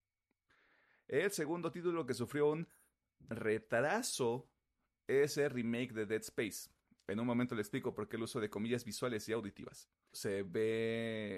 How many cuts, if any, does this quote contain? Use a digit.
1